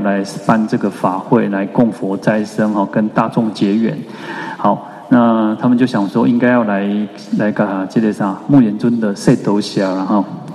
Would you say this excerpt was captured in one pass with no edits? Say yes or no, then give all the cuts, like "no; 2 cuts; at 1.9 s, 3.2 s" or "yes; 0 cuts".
yes; 0 cuts